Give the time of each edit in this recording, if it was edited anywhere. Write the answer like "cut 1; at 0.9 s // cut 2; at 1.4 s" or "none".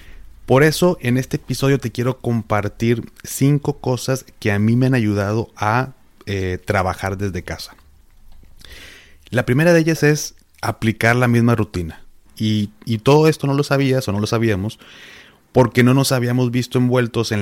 cut 1; at 12.3 s